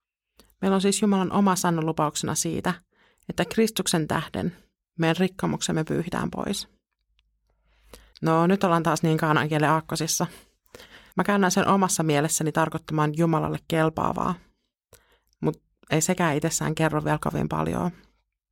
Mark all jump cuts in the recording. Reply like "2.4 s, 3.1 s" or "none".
8.1 s, 11.1 s